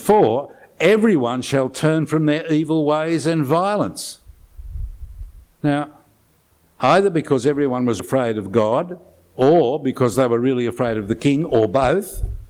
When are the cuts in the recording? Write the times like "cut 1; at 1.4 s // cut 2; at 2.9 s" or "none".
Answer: cut 1; at 8.0 s